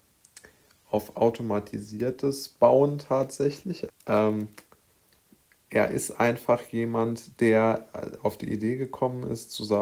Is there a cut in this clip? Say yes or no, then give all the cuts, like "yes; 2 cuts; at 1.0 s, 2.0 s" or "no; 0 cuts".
yes; 1 cut; at 3.9 s